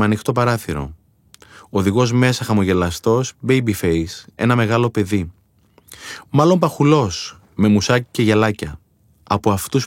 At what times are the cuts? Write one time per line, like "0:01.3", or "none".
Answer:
none